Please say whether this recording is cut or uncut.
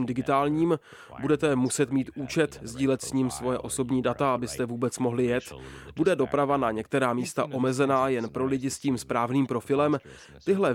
uncut